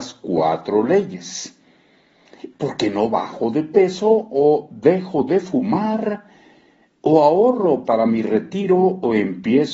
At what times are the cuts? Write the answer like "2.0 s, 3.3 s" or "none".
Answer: 2.5 s